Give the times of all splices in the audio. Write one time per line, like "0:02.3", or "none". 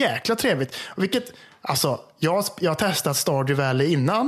none